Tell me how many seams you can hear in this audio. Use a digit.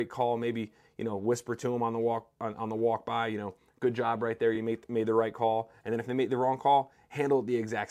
0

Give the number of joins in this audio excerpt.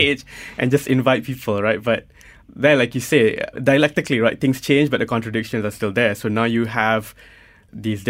1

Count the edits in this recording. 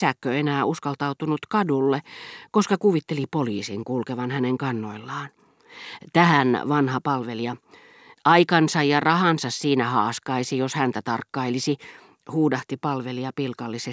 1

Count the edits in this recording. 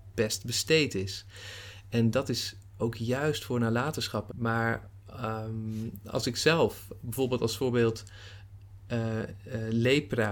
1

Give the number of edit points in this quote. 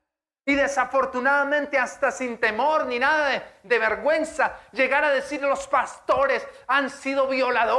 0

